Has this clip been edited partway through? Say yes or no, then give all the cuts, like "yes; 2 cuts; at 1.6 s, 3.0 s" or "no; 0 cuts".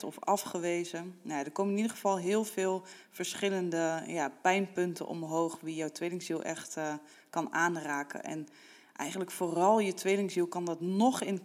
no; 0 cuts